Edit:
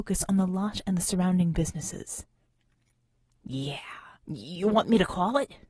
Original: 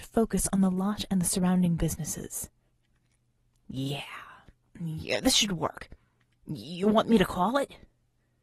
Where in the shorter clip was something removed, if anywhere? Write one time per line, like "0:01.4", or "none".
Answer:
0:04.2